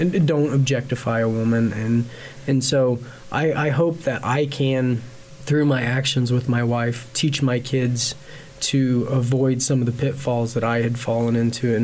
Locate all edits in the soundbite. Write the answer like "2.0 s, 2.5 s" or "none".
none